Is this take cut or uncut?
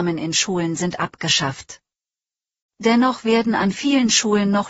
uncut